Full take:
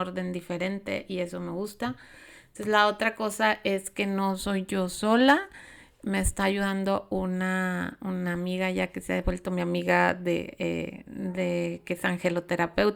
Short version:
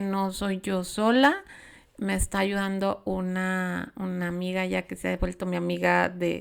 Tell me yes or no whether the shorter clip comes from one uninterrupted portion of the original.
yes